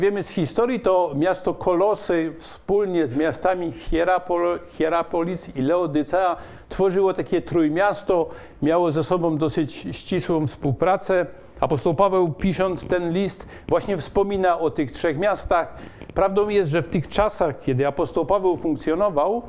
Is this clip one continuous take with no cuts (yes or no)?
no